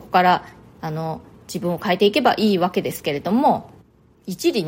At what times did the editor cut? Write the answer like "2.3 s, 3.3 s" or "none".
none